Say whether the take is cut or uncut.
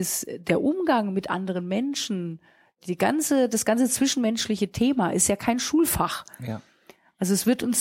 uncut